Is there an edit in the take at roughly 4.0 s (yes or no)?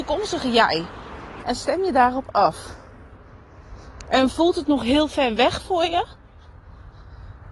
no